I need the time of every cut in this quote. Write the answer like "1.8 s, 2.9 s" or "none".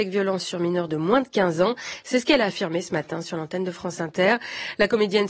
none